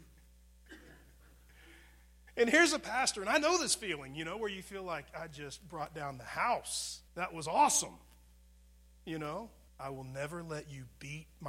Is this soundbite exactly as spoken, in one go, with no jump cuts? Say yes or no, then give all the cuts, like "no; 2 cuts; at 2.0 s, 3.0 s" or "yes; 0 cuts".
no; 2 cuts; at 7.1 s, 9.7 s